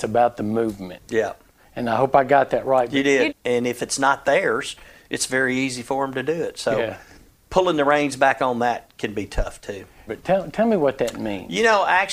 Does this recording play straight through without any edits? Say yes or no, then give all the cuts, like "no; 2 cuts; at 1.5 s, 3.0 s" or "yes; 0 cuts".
no; 2 cuts; at 3.3 s, 10.1 s